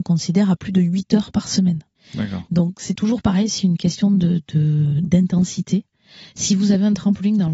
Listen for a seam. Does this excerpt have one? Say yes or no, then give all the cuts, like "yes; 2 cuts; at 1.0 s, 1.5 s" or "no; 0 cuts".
no; 0 cuts